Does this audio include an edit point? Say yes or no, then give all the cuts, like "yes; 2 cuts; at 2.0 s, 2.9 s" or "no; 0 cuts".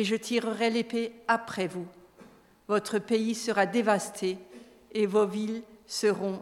no; 0 cuts